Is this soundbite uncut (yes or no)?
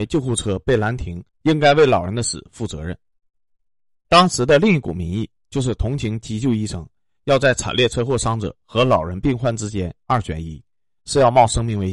no